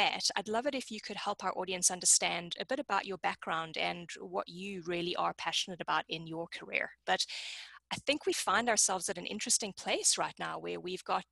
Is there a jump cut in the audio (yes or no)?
yes